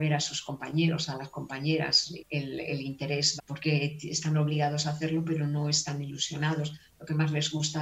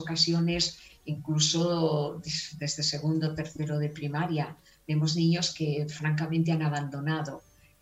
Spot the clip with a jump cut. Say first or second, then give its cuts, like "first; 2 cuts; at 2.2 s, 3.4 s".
first; 2 cuts; at 2.2 s, 3.4 s